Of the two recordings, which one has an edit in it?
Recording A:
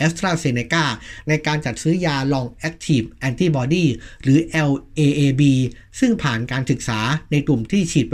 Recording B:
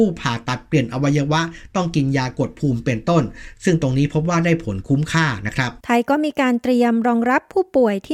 B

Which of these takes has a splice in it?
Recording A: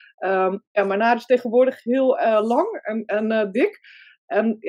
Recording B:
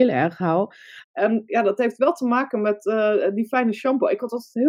B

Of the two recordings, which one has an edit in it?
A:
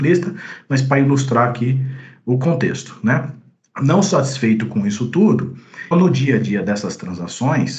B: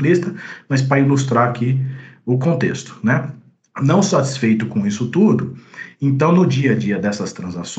A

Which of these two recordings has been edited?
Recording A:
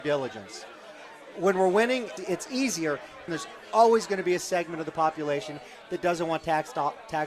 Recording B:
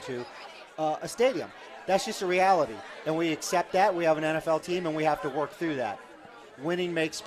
A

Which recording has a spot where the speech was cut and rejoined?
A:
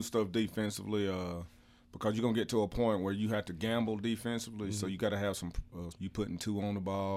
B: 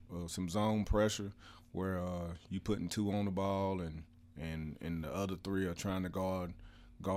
A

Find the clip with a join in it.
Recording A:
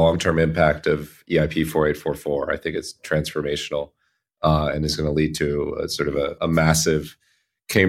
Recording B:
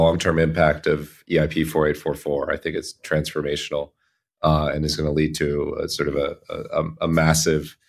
A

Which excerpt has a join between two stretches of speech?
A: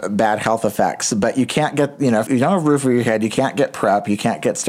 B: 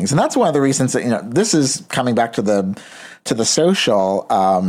A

